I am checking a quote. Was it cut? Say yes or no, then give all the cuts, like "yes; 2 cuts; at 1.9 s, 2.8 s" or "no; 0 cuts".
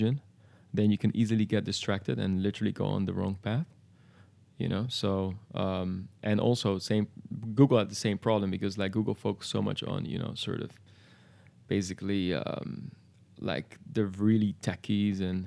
no; 0 cuts